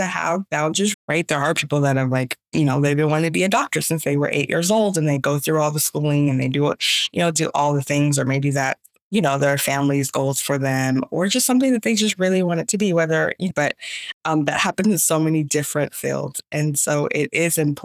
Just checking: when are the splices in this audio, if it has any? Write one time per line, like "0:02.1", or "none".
0:00.9
0:13.5